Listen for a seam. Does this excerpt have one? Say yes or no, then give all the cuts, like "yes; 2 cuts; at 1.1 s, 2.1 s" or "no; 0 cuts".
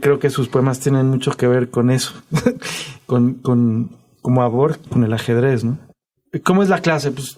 yes; 1 cut; at 4.9 s